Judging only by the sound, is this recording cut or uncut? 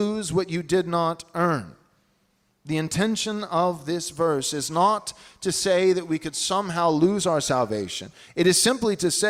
uncut